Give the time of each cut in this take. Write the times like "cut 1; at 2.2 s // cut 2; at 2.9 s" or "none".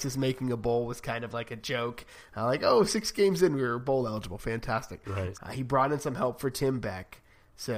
cut 1; at 5.3 s